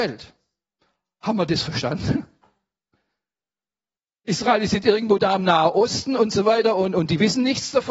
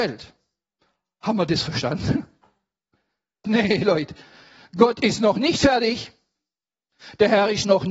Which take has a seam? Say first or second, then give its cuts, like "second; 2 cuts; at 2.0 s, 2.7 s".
second; 1 cut; at 3.4 s